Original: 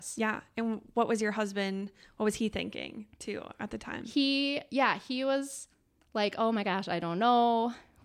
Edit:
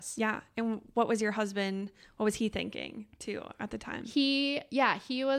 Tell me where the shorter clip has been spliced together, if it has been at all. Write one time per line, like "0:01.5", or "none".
none